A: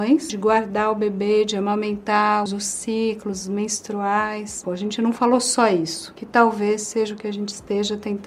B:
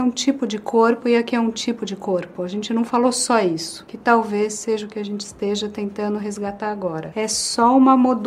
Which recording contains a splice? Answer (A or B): A